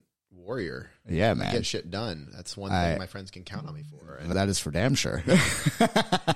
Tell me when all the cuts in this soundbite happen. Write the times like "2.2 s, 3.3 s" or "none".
none